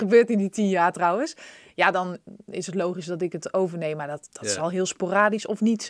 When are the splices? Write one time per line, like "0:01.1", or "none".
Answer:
none